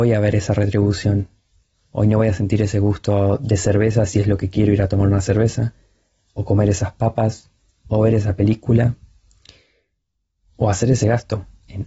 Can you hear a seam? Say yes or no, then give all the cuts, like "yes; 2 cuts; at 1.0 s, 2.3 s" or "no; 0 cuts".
no; 0 cuts